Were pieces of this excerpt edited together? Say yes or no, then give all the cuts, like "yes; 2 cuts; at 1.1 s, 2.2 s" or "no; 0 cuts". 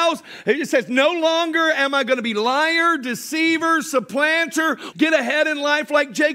yes; 1 cut; at 4.9 s